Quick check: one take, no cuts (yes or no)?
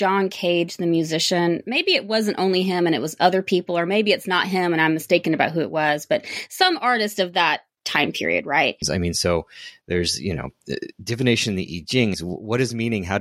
no